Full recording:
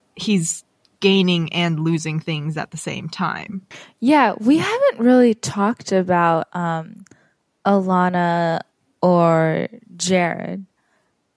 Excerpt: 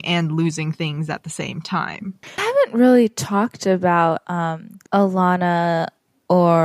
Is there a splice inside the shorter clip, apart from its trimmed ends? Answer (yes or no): yes